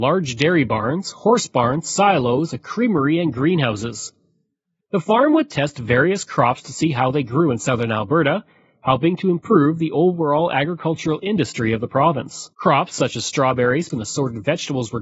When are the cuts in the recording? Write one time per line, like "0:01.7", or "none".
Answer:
0:04.8
0:12.5
0:13.9